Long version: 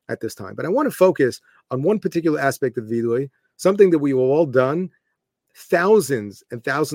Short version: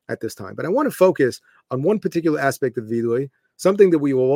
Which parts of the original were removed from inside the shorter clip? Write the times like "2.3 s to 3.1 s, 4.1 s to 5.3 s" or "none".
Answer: none